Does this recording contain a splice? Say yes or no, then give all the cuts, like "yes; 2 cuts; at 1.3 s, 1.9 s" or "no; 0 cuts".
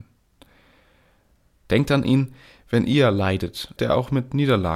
yes; 2 cuts; at 1.6 s, 3.8 s